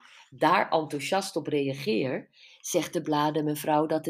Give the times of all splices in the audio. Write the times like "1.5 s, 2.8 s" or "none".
none